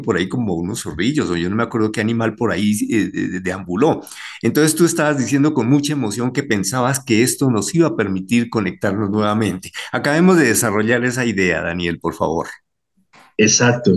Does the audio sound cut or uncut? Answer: uncut